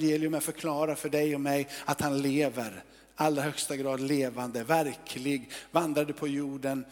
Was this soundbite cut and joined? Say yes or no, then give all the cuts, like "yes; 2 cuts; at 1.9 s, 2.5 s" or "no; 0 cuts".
no; 0 cuts